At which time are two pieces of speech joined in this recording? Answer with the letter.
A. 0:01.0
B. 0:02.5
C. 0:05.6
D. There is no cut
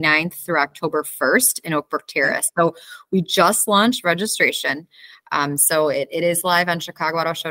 D